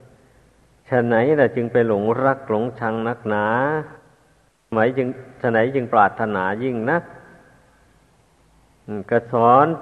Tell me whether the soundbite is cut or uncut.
cut